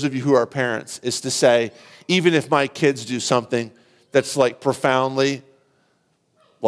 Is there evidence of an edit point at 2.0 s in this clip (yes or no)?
no